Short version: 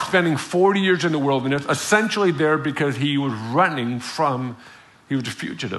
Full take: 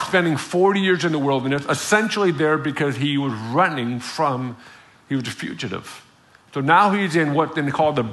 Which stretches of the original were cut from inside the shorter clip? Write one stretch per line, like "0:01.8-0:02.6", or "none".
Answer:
none